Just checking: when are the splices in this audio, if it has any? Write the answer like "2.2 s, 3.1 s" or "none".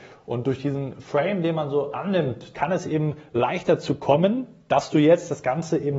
2.5 s